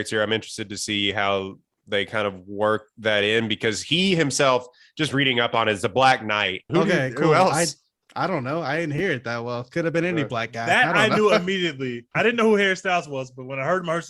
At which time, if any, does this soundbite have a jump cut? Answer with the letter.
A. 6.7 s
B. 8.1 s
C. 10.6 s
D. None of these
A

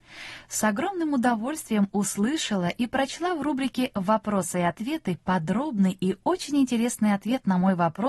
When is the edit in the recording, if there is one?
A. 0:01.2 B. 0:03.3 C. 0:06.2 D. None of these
D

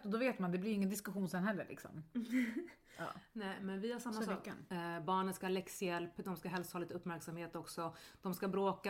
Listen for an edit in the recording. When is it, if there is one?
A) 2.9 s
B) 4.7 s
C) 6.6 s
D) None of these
B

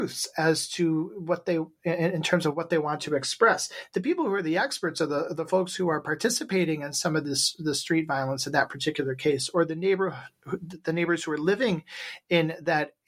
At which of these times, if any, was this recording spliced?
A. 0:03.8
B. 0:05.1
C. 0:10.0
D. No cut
D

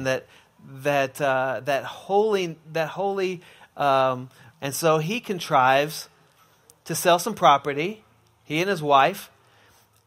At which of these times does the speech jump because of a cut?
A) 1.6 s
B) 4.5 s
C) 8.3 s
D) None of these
B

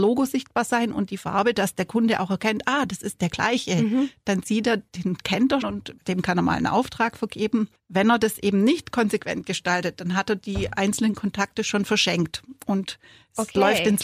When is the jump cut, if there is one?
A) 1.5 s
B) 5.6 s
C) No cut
B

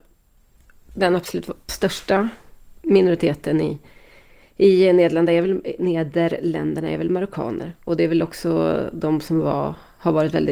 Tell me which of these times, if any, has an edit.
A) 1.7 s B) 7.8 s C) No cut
A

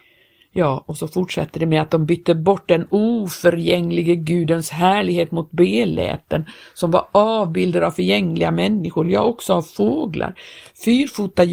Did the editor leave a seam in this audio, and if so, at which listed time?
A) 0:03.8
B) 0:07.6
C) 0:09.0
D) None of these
D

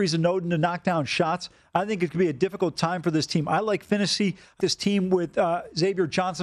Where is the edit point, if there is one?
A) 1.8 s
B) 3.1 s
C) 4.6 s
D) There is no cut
C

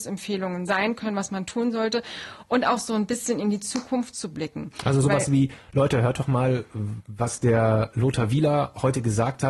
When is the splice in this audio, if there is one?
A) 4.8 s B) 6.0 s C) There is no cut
C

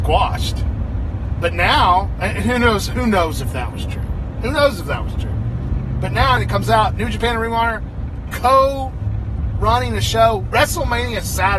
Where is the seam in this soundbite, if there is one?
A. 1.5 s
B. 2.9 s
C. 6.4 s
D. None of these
C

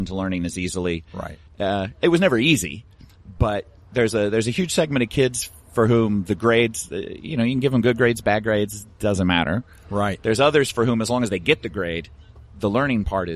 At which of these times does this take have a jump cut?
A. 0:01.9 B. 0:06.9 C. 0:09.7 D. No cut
D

